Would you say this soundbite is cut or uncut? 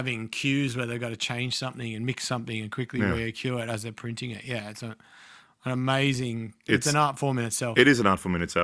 uncut